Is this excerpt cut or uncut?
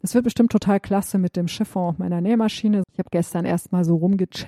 cut